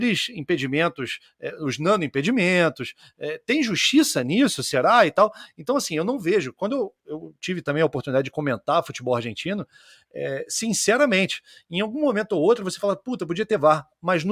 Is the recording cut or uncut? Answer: uncut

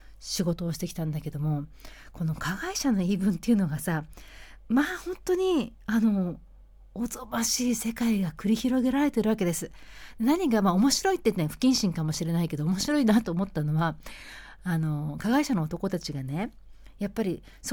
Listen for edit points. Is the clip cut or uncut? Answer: uncut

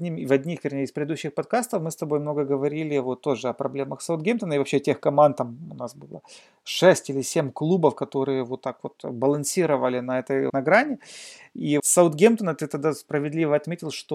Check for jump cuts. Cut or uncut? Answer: cut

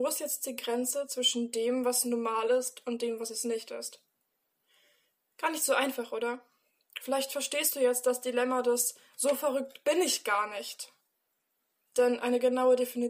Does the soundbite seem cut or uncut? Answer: uncut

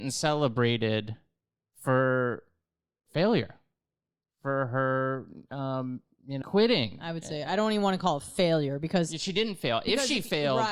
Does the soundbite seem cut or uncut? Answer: cut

